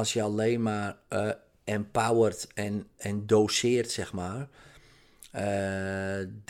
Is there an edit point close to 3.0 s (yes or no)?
yes